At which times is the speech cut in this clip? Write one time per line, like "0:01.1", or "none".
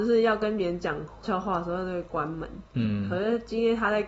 0:01.2